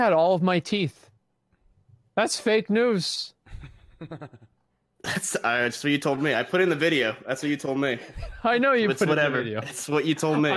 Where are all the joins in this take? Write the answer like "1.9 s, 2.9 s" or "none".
none